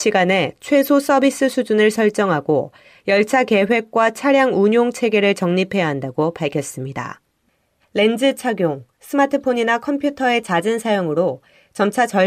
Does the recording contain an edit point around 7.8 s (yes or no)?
yes